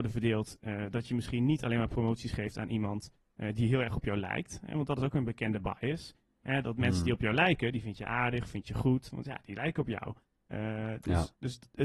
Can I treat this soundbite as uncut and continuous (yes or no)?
yes